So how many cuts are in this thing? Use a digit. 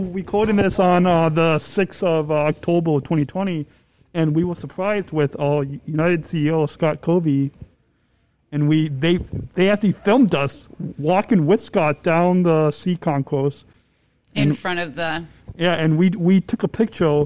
0